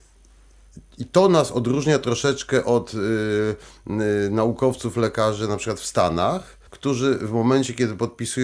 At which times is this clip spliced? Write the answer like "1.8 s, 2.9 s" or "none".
6.7 s